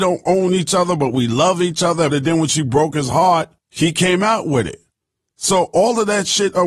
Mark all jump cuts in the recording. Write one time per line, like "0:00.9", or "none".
0:02.1
0:03.6